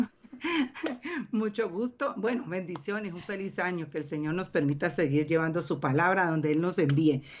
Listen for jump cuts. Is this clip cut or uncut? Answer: uncut